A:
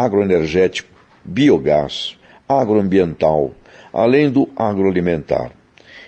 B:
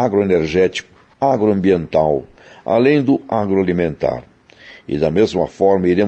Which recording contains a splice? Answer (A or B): B